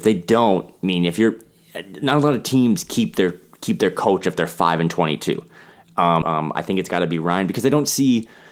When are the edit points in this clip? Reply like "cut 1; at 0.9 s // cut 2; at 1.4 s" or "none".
cut 1; at 6.2 s